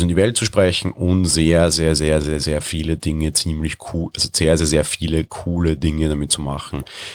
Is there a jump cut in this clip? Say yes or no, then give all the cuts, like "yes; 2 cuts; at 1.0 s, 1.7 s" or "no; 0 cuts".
no; 0 cuts